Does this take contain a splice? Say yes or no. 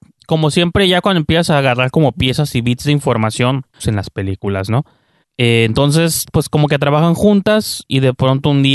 yes